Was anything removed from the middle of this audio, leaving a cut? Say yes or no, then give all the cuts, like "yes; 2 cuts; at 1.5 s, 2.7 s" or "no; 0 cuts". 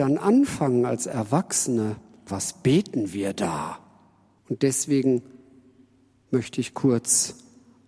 yes; 2 cuts; at 2.3 s, 4.4 s